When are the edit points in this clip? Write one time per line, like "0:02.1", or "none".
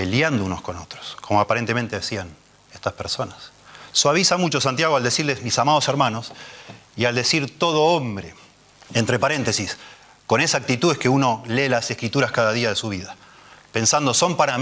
0:08.9